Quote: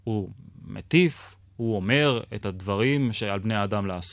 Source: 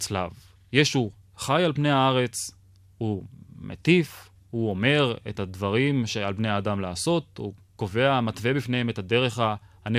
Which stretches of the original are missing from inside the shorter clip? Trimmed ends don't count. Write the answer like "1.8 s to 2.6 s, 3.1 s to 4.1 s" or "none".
none